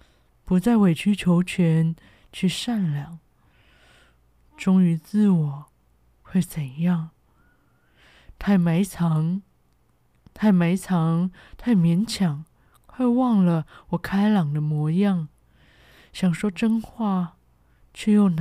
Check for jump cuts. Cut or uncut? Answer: uncut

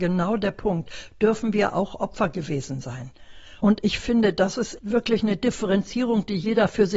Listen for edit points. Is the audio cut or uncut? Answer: cut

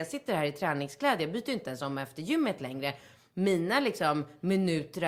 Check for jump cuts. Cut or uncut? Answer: uncut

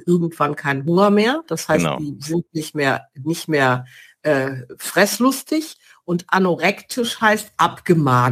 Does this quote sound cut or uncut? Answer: uncut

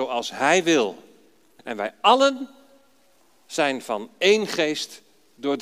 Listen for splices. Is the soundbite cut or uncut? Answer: cut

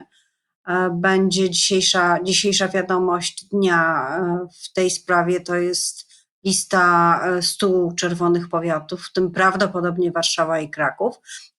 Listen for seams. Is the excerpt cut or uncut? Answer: uncut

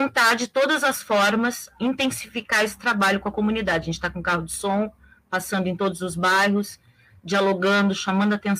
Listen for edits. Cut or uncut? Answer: uncut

